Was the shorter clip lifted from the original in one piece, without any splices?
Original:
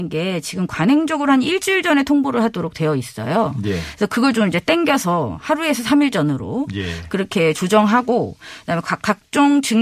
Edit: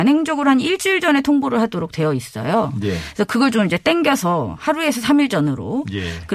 yes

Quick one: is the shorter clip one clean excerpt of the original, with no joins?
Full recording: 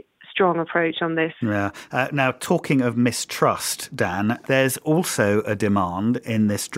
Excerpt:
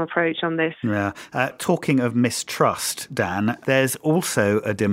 no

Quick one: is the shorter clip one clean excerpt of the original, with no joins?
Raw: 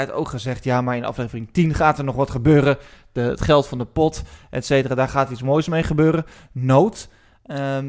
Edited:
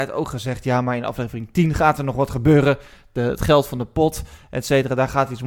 yes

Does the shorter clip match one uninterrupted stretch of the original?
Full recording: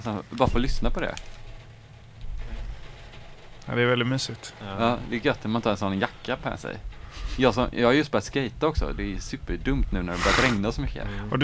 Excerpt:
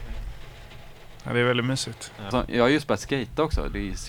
no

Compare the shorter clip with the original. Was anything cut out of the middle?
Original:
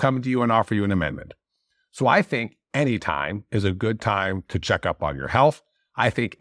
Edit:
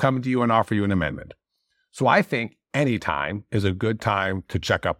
no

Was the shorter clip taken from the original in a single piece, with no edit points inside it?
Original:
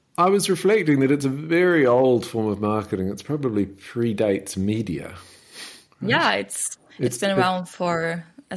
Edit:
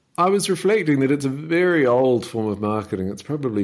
yes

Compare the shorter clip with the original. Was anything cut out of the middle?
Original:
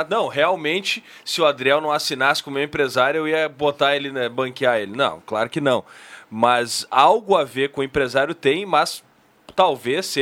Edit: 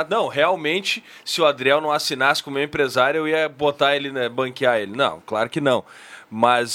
no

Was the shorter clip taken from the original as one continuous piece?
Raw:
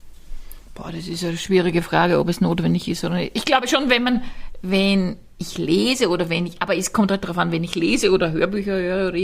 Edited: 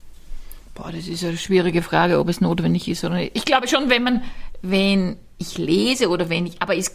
yes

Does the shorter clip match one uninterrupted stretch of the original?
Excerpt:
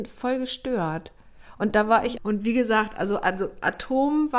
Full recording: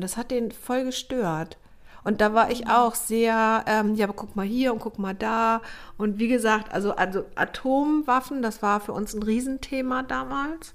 no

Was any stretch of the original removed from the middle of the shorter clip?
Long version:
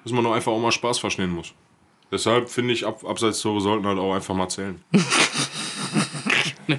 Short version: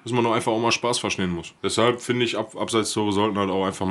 yes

